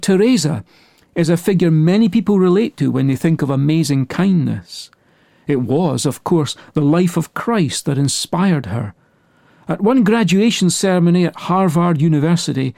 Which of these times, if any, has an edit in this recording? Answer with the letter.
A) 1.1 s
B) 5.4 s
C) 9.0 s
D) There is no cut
D